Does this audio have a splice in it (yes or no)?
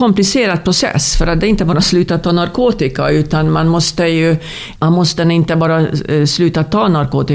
yes